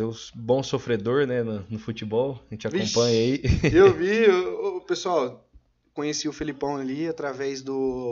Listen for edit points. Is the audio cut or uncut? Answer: uncut